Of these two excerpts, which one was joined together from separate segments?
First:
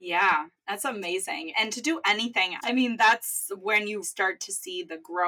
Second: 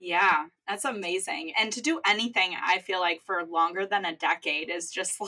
first; 2 cuts; at 2.6 s, 4.0 s

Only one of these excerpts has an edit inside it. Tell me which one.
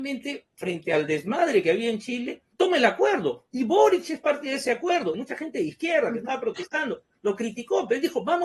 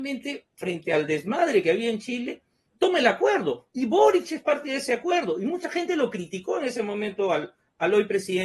first; 2 cuts; at 2.5 s, 5.1 s

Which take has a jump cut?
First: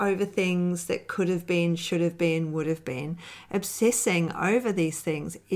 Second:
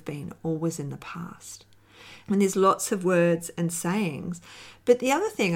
second; 1 cut; at 2.3 s

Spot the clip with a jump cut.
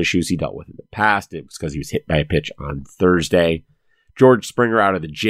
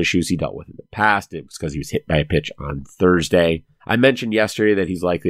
second; 1 cut; at 3.8 s

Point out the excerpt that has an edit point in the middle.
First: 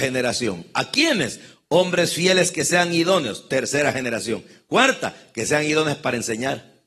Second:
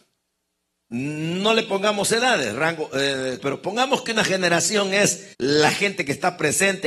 second; 2 cuts; at 3.4 s, 5.3 s

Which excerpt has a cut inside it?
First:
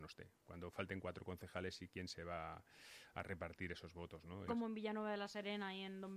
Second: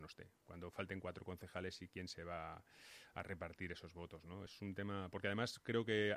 first; 1 cut; at 4.5 s

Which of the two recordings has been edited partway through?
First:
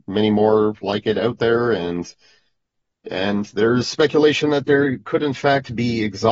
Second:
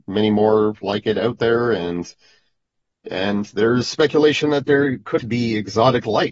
second; 1 cut; at 5.2 s

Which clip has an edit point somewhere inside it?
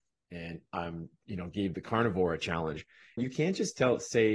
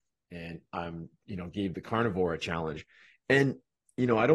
first; 1 cut; at 3.2 s

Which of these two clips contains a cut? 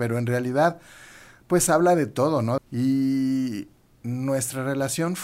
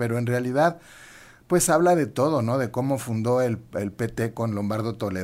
first; 1 cut; at 2.6 s

